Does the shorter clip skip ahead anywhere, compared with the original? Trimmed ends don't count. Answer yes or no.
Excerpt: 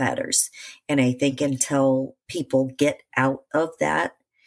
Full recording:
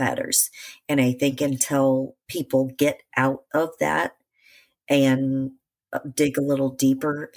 no